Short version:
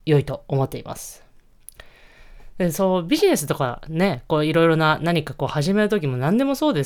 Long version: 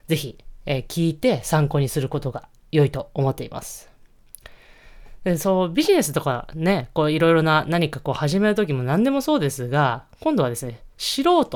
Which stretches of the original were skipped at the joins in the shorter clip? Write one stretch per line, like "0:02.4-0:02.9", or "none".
none